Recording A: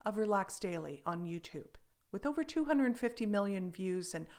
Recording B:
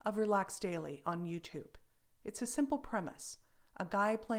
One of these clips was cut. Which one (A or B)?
A